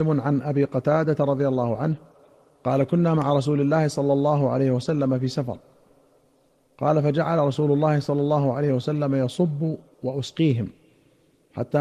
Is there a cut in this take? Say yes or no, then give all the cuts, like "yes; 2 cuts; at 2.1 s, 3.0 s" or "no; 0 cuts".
no; 0 cuts